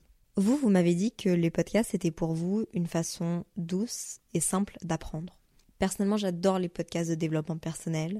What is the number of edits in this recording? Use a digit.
1